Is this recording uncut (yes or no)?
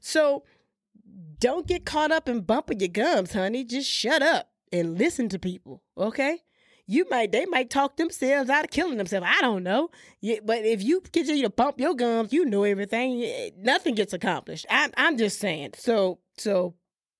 no